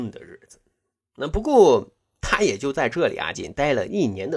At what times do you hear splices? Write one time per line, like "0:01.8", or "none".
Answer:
0:03.3

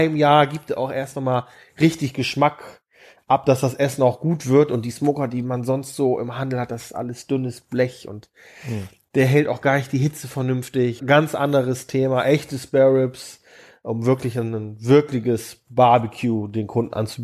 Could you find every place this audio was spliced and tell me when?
0:11.0

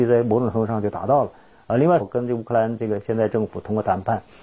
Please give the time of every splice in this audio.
0:02.0

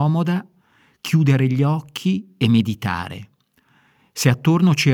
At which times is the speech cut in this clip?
none

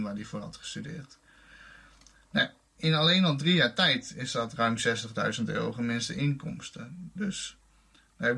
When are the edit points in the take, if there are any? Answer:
0:02.8

